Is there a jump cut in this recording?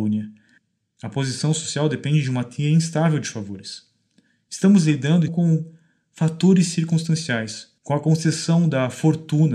yes; 2 cuts; at 5.3 s, 7.8 s

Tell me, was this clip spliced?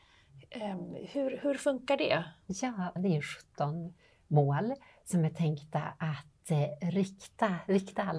yes; 1 cut; at 3.0 s

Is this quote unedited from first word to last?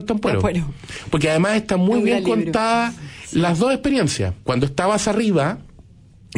no; 1 cut; at 4.4 s

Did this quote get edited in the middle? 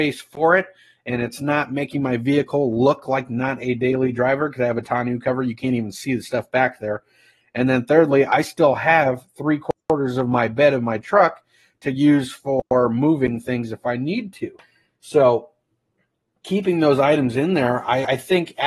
no; 0 cuts

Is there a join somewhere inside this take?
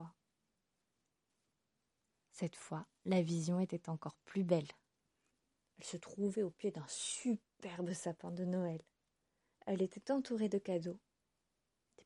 yes; 1 cut; at 2.3 s

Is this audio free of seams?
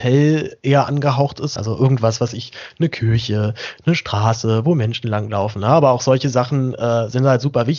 no; 1 cut; at 1.6 s

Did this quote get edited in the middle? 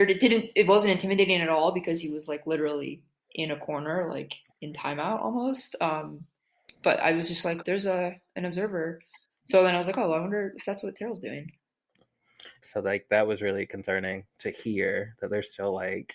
yes; 2 cuts; at 7.6 s, 12.6 s

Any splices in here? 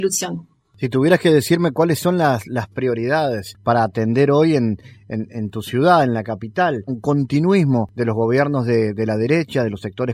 yes; 1 cut; at 6.9 s

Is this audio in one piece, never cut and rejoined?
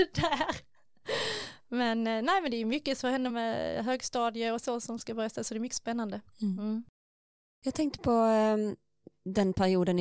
no; 1 cut; at 3.3 s

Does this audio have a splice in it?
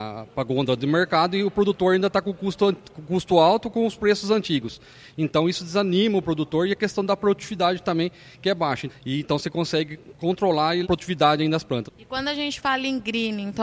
yes; 3 cuts; at 8.9 s, 10.8 s, 11.9 s

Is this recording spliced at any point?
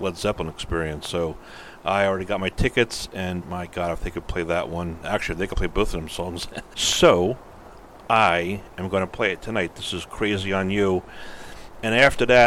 yes; 2 cuts; at 3.4 s, 6.7 s

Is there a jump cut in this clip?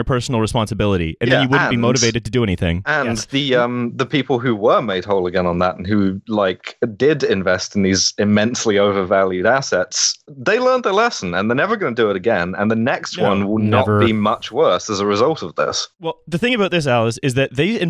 no; 0 cuts

